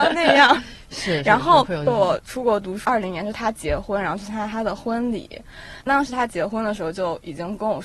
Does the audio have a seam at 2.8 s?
yes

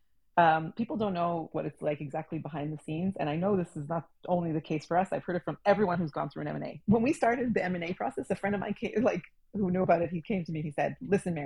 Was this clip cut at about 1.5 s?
yes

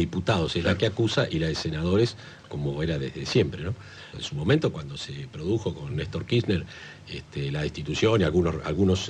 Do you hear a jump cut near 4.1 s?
yes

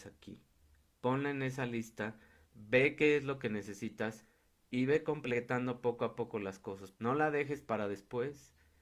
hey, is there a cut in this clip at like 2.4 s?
yes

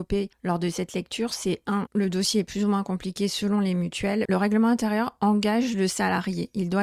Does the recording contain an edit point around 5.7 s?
no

